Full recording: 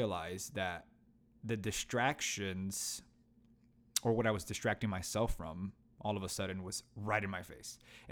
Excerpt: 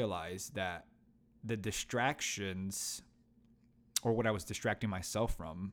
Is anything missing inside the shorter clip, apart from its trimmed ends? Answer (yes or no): no